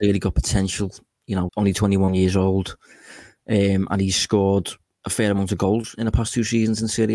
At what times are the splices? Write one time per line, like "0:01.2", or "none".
0:01.5

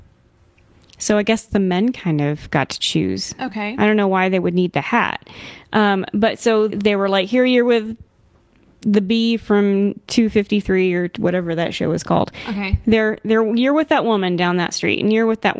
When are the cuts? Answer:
0:01.5
0:06.7

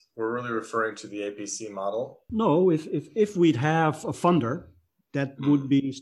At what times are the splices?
0:02.3

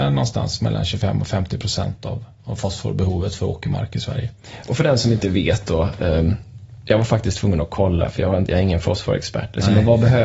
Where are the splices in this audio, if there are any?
none

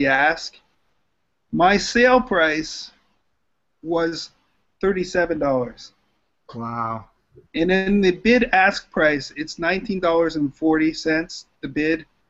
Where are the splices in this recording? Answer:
0:07.5

